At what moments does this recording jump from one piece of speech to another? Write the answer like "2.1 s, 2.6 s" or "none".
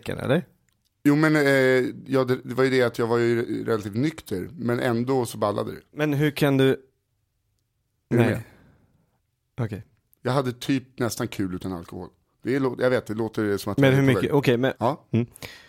8.0 s, 14.7 s